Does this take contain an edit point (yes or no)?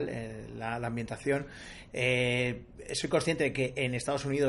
yes